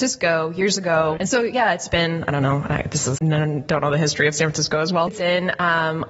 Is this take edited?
yes; 3 cuts; at 1.2 s, 3.2 s, 5.1 s

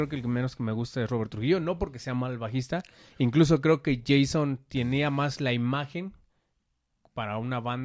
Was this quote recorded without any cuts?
yes; 0 cuts

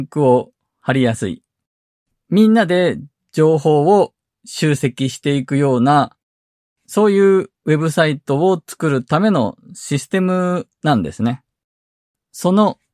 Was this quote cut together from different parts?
no; 0 cuts

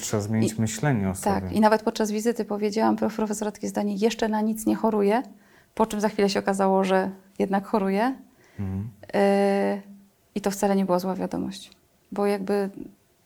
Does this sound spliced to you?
no; 0 cuts

